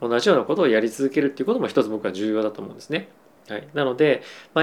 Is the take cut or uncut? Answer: cut